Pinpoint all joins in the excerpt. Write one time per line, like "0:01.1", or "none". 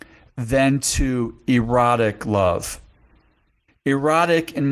0:03.7

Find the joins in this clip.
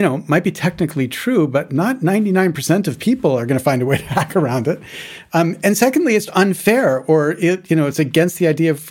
0:06.3

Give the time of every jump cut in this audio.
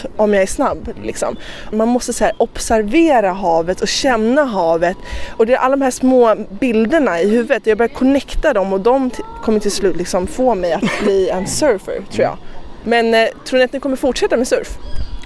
0:01.7

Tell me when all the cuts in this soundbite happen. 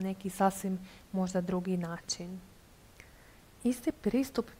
none

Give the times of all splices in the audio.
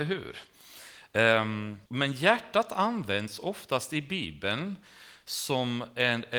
0:01.9

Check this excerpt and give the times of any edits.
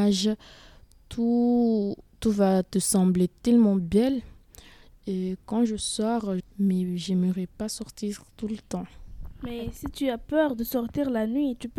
0:04.9
0:06.4

